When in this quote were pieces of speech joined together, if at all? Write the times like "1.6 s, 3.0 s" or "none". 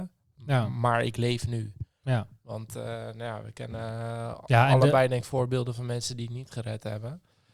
none